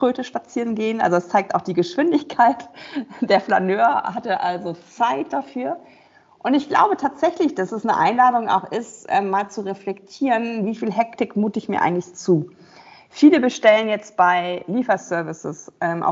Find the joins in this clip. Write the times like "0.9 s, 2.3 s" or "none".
none